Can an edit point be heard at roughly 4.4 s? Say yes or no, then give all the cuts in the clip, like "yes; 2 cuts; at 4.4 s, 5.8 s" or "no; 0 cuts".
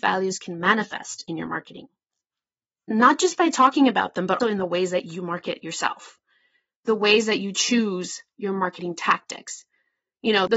yes; 1 cut; at 4.4 s